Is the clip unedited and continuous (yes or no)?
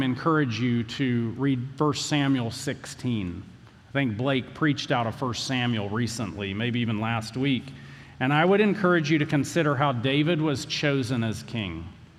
yes